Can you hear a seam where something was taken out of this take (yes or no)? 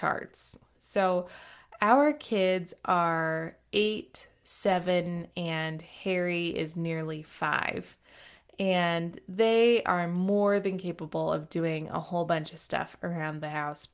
no